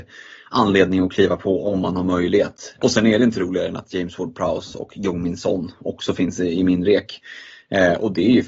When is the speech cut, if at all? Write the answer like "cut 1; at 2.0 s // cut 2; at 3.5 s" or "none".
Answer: cut 1; at 2.8 s